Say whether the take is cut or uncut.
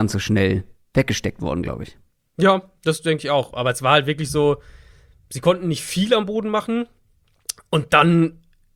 uncut